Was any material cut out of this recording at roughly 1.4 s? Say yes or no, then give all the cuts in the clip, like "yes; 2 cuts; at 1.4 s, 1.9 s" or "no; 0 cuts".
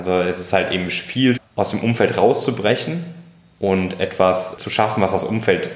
yes; 2 cuts; at 1.4 s, 4.6 s